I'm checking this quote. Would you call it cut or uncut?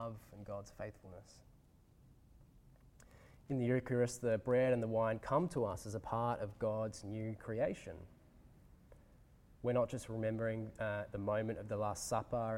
uncut